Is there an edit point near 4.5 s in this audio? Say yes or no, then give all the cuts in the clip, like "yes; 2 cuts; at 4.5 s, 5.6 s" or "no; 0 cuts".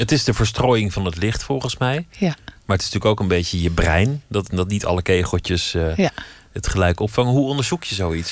yes; 1 cut; at 4.5 s